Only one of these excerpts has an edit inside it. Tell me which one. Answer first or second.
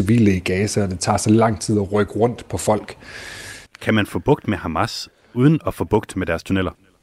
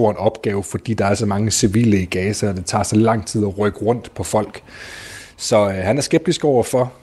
first